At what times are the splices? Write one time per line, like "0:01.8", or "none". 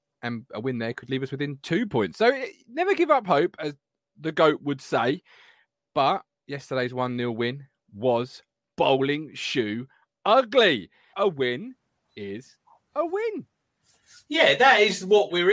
0:11.1

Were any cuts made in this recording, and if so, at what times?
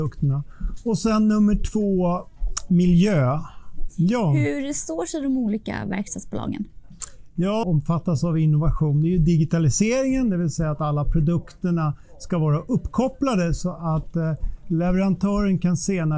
0:03.9
0:07.6

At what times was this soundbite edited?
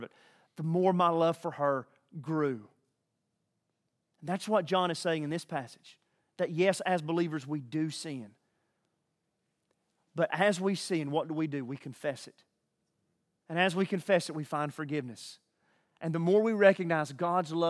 none

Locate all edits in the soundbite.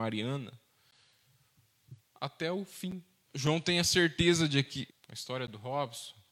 0:03.3
0:04.9

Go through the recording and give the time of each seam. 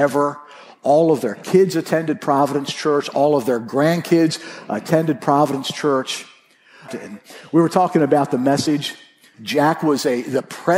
0:06.9
0:09.3

